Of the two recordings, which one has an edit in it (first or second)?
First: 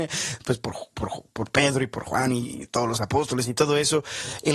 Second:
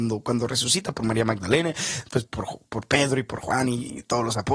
second